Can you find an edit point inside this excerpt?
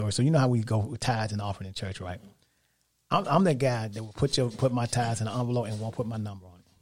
no; 0 cuts

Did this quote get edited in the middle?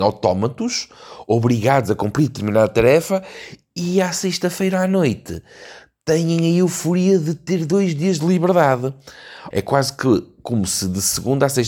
yes; 1 cut; at 9.5 s

